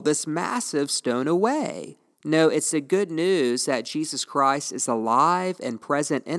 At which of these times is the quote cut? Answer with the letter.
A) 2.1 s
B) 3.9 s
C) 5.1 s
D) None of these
A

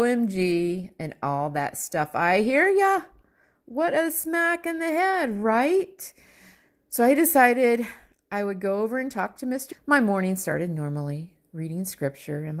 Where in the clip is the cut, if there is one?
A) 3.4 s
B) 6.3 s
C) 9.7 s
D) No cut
C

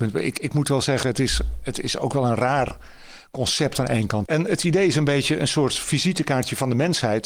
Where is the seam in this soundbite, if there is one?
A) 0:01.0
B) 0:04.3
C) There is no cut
B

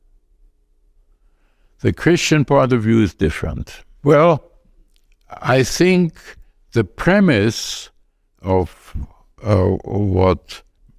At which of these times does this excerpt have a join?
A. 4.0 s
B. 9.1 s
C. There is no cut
A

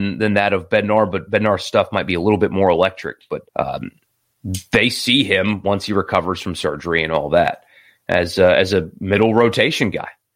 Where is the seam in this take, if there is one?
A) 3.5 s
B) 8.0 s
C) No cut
A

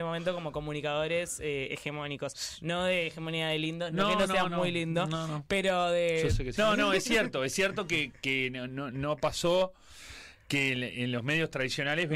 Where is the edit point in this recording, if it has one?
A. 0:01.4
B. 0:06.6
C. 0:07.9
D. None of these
B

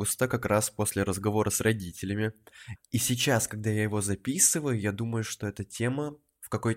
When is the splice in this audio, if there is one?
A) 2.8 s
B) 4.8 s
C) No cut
A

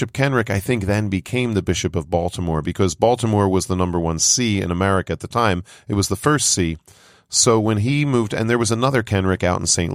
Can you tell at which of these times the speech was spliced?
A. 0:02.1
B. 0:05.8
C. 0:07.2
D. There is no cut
D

